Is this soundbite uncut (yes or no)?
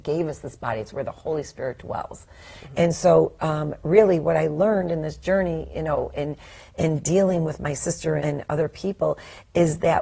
no